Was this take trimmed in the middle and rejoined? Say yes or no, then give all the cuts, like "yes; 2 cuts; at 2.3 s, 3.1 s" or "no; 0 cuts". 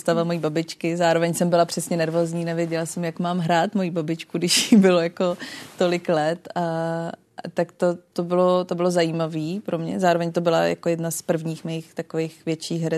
no; 0 cuts